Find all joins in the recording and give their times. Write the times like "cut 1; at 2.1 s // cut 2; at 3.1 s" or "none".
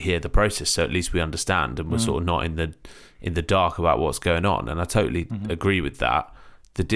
none